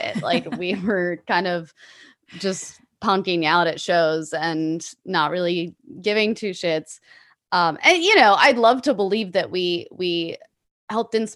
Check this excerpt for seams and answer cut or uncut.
uncut